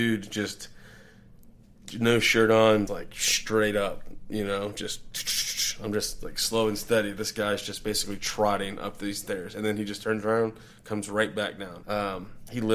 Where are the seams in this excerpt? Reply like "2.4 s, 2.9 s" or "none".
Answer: 2.9 s, 11.8 s